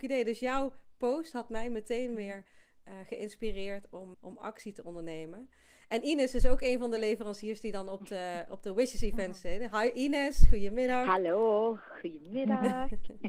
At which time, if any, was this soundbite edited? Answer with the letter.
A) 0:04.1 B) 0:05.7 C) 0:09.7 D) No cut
A